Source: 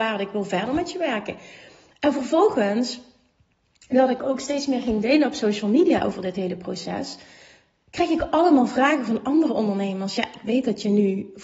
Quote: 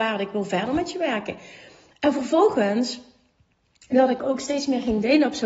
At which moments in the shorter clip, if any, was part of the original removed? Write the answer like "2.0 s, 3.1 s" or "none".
none